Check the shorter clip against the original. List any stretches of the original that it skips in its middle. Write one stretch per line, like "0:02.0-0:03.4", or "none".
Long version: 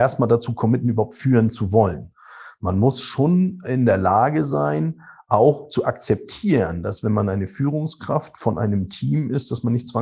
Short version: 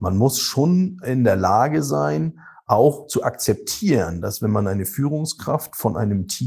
none